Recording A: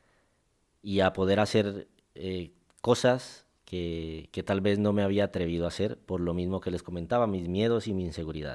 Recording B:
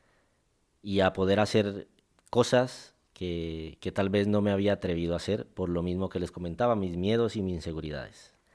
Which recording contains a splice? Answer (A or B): B